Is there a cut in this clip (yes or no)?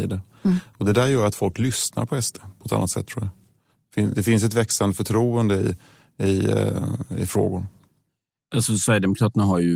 no